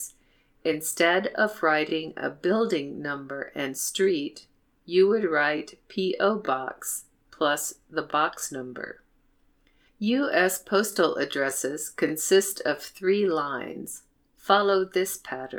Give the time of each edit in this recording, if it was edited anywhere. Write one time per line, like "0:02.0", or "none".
none